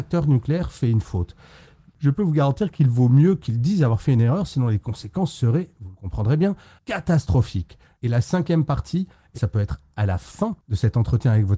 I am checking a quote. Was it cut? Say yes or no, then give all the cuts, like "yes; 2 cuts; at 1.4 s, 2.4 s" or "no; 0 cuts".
yes; 2 cuts; at 8.0 s, 9.3 s